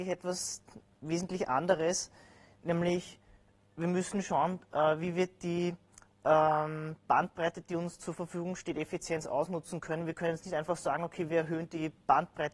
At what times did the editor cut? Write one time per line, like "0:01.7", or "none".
none